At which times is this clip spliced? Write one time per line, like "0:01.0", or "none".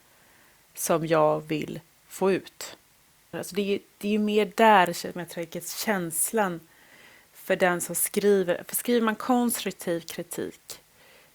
0:03.3